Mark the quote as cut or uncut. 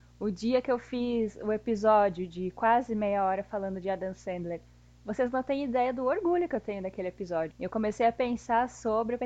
cut